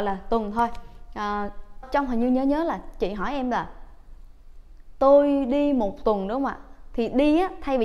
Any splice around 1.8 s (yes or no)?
yes